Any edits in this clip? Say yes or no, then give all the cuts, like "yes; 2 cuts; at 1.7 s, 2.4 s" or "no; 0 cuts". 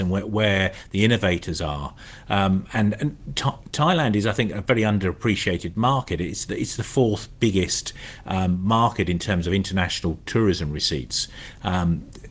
no; 0 cuts